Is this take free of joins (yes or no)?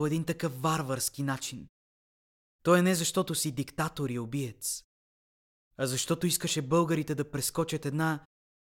yes